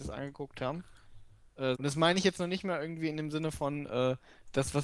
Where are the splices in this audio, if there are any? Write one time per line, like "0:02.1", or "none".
0:01.7